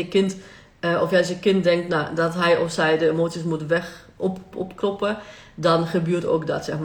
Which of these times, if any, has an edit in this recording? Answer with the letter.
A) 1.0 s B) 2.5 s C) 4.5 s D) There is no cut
C